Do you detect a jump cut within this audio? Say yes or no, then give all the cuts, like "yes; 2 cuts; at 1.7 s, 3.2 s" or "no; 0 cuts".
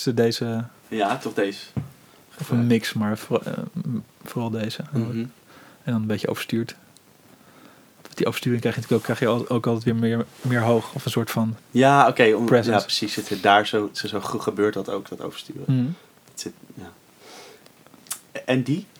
no; 0 cuts